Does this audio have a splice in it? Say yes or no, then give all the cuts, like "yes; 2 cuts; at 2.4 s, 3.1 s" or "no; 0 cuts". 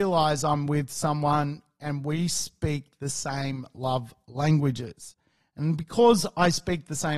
no; 0 cuts